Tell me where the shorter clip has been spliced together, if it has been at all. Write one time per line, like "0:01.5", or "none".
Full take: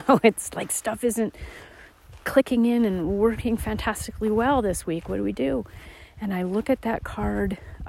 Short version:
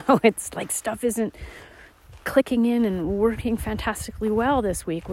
none